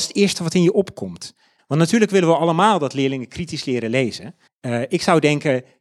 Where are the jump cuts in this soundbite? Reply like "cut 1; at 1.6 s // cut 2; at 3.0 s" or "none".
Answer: cut 1; at 1.6 s // cut 2; at 4.5 s

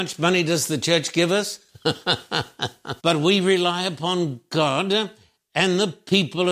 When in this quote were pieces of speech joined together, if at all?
cut 1; at 3.0 s

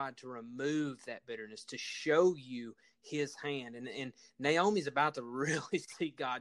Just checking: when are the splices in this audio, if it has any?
none

